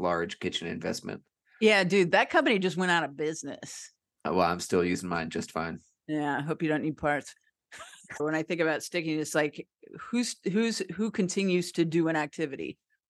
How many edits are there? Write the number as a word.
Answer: one